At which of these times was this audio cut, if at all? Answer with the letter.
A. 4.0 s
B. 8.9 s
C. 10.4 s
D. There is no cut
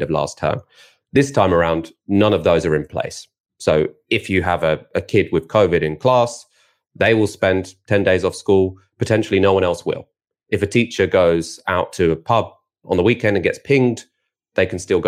D